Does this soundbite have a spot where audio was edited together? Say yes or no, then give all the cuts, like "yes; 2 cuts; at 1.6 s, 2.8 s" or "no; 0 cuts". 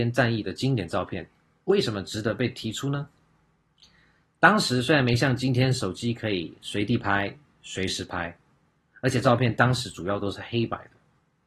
no; 0 cuts